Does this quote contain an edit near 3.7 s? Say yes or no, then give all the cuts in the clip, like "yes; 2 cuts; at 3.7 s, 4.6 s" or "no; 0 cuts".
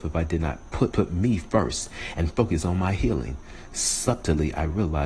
no; 1 cut; at 0.9 s